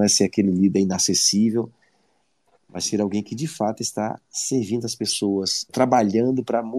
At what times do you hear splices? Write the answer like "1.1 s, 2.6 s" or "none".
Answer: 5.7 s

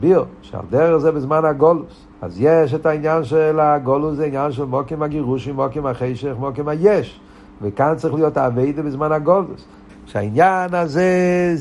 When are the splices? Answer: 2.1 s, 9.9 s

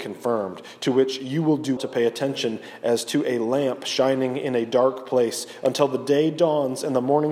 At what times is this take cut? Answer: 1.8 s

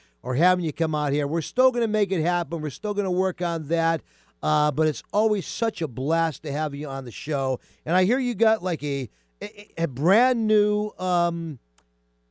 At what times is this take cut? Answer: none

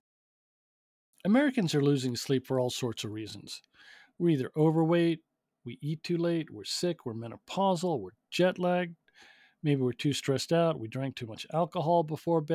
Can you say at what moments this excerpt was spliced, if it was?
none

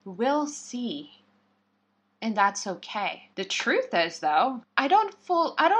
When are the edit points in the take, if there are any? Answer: 3.3 s, 4.6 s

